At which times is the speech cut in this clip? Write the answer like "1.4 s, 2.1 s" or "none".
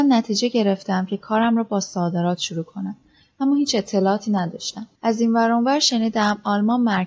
none